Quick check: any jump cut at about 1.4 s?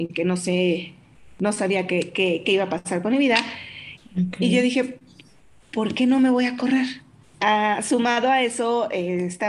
no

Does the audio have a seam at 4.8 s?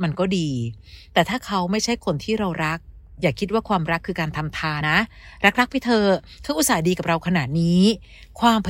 yes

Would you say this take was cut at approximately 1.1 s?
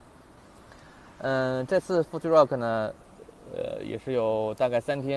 no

